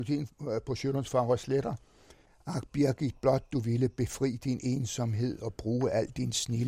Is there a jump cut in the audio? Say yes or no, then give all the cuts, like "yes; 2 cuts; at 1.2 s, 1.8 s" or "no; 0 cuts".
no; 0 cuts